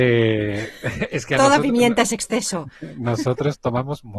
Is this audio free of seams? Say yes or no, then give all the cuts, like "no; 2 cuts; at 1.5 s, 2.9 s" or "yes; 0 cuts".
yes; 0 cuts